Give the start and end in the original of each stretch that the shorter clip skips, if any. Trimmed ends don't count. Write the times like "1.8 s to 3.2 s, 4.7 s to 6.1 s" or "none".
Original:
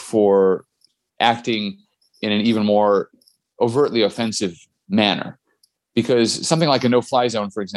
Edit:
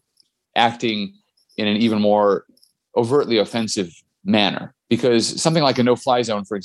5.4 s to 5.8 s